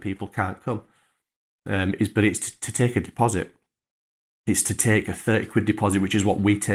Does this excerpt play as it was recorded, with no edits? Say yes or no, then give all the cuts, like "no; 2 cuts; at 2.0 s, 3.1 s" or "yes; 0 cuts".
yes; 0 cuts